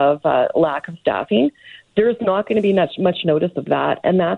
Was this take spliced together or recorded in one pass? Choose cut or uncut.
uncut